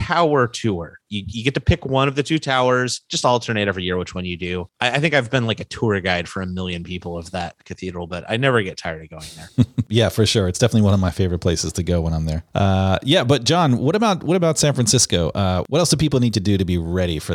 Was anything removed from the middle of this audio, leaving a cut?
no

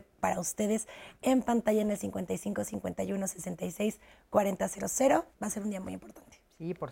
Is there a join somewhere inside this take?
yes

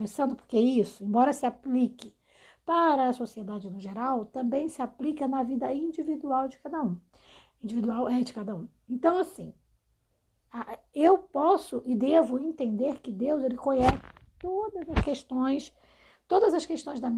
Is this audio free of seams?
yes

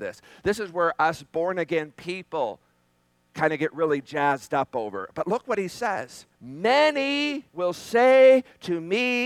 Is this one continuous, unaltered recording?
no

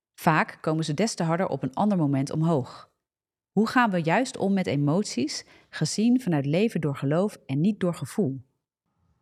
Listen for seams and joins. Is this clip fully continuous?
yes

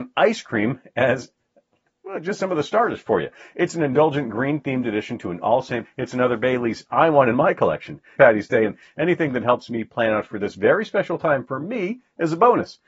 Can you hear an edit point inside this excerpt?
yes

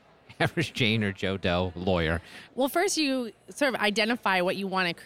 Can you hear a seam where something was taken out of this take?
yes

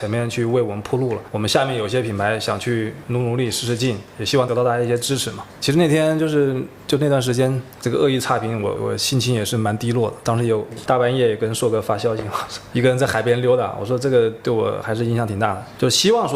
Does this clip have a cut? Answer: yes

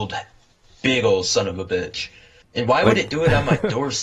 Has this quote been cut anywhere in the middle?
yes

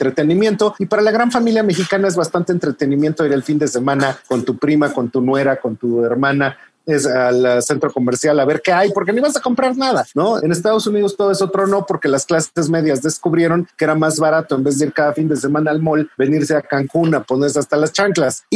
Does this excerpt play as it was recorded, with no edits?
no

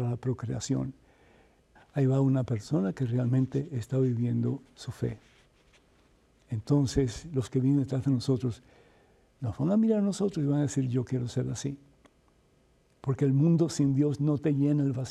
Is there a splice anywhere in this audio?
yes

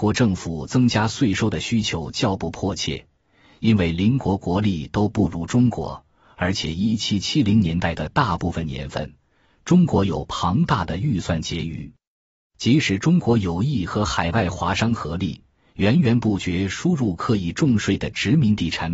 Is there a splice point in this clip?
no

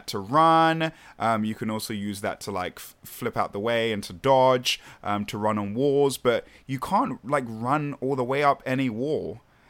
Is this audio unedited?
yes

